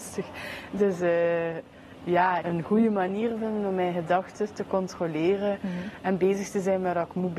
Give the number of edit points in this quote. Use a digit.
1